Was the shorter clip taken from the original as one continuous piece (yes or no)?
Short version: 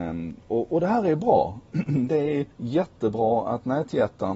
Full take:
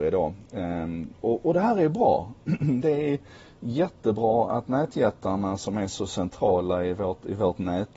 no